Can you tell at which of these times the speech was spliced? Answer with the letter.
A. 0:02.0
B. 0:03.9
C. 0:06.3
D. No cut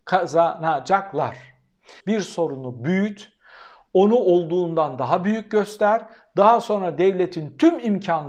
A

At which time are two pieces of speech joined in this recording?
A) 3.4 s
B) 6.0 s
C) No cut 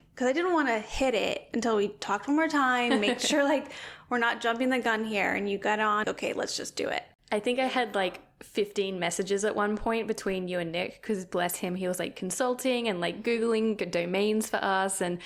B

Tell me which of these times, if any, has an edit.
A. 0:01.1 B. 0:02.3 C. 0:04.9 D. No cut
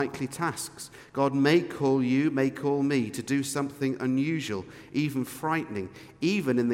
D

